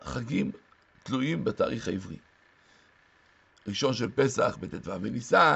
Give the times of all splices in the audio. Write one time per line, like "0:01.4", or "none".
none